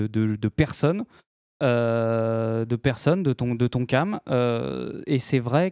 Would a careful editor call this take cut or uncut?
uncut